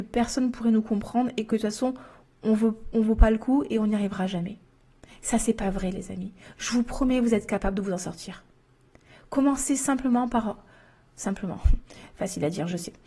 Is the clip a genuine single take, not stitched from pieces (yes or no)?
yes